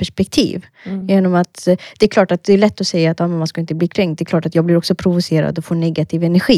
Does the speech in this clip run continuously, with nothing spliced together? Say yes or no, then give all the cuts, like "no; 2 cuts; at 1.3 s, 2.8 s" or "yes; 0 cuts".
yes; 0 cuts